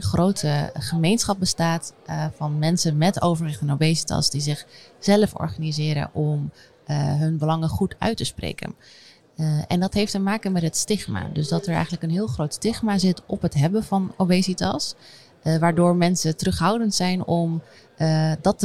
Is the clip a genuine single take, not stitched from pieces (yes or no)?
yes